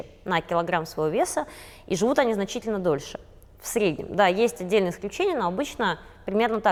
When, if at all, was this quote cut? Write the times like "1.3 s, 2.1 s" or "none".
none